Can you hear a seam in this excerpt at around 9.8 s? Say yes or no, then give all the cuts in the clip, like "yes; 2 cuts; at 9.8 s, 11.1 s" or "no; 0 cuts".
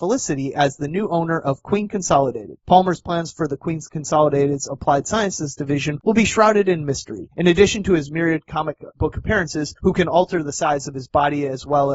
yes; 1 cut; at 9.8 s